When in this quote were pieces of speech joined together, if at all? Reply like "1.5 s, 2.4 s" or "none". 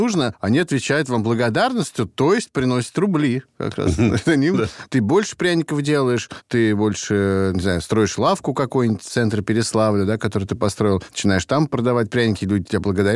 4.9 s